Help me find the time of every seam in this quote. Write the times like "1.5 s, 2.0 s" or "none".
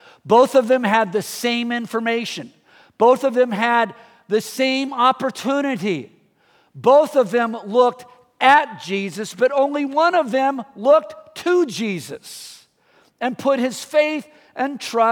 none